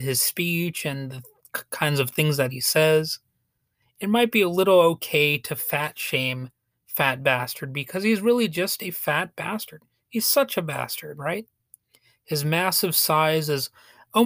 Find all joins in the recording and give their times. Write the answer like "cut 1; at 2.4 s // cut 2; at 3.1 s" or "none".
cut 1; at 3.8 s